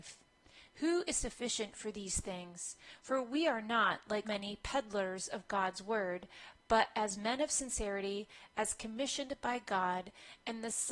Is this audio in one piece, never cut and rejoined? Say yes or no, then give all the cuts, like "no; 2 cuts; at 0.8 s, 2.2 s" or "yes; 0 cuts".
no; 1 cut; at 4.2 s